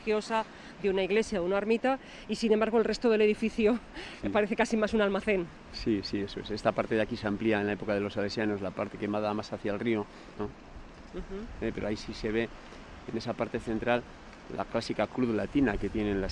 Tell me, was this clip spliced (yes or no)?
yes